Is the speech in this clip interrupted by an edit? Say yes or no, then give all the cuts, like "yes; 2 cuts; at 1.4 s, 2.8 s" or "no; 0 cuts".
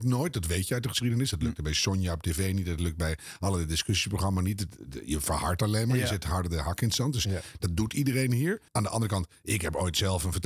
yes; 1 cut; at 8.7 s